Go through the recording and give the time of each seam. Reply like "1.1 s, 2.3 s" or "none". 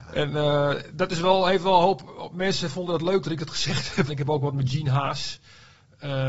4.1 s